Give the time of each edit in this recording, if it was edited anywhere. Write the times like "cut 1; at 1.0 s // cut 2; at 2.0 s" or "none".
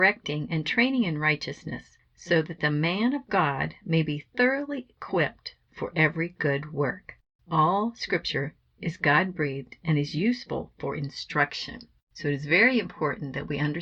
cut 1; at 7.4 s